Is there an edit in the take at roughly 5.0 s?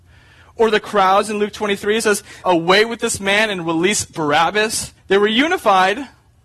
yes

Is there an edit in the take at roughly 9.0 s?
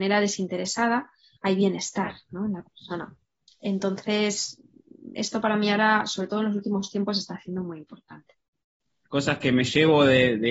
yes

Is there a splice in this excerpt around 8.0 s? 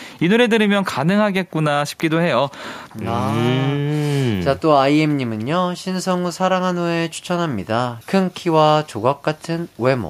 yes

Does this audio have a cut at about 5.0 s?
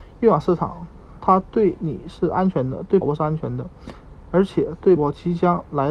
yes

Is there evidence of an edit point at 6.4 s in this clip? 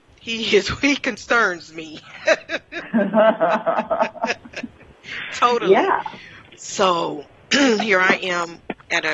yes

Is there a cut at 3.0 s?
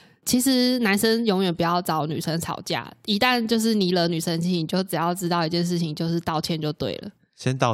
no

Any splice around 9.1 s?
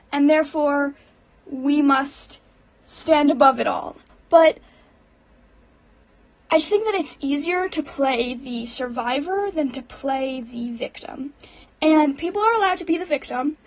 no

